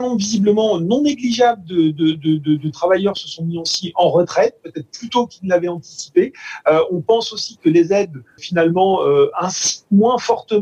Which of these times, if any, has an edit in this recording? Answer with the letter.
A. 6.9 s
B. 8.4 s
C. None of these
B